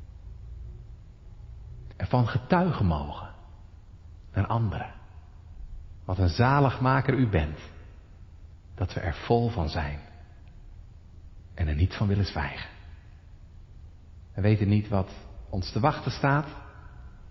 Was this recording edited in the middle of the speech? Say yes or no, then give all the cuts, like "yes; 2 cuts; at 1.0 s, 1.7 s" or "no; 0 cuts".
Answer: yes; 2 cuts; at 1.9 s, 14.3 s